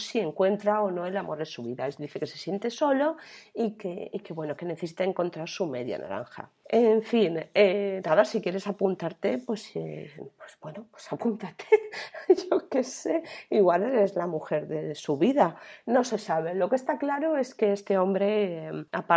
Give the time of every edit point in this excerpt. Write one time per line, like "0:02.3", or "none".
none